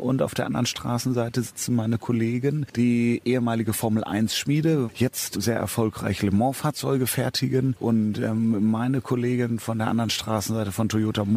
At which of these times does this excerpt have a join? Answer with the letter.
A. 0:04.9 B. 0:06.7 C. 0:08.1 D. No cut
A